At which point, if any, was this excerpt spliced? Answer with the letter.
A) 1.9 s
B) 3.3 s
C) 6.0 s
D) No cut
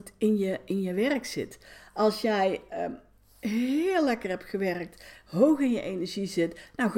D